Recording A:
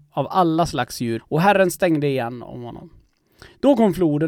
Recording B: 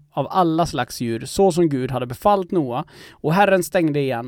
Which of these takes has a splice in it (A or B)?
A